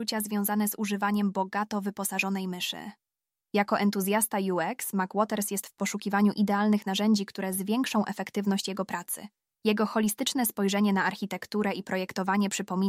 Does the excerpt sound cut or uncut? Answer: cut